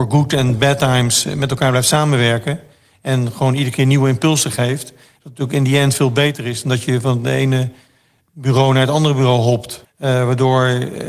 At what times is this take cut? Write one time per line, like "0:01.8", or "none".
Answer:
0:09.8